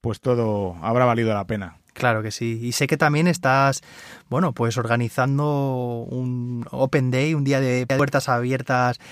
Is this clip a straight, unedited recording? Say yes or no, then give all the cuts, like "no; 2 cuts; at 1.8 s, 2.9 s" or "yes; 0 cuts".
yes; 0 cuts